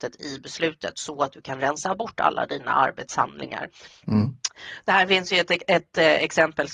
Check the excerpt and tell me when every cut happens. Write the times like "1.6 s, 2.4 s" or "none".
3.9 s